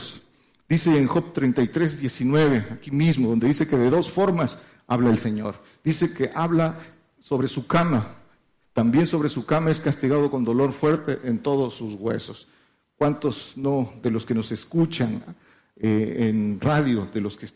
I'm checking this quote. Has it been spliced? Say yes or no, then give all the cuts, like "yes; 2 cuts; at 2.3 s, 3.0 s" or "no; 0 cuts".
no; 0 cuts